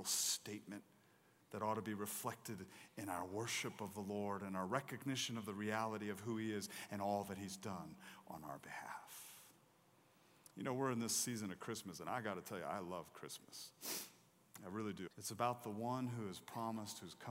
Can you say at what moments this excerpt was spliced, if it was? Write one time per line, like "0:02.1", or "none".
0:15.1